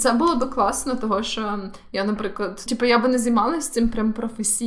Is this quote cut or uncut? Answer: cut